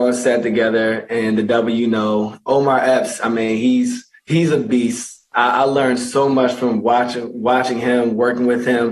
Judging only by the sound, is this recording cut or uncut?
cut